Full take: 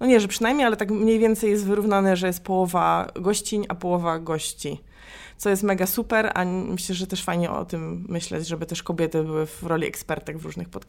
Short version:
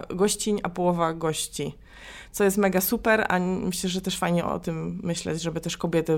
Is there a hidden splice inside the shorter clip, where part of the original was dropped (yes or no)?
no